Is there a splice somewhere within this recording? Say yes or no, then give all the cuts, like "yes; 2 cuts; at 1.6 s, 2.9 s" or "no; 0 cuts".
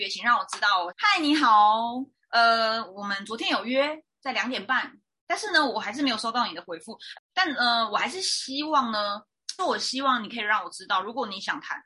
yes; 3 cuts; at 0.9 s, 7.2 s, 9.6 s